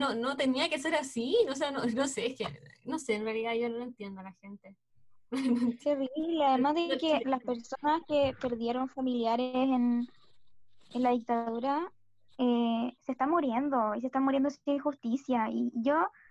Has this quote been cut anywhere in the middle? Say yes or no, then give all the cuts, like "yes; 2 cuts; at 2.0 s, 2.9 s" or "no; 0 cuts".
no; 0 cuts